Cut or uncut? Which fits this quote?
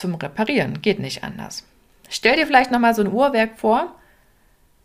uncut